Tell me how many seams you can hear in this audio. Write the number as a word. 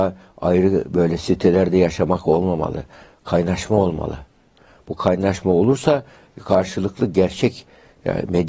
zero